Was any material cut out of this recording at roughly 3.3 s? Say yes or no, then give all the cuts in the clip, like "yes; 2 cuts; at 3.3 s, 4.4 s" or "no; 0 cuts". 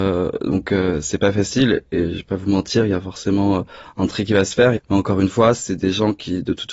no; 1 cut; at 4.8 s